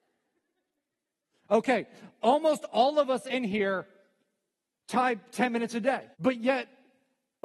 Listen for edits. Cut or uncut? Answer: cut